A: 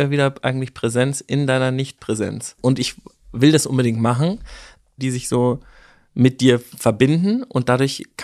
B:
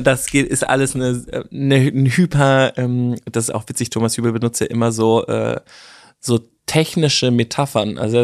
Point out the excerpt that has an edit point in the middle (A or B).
A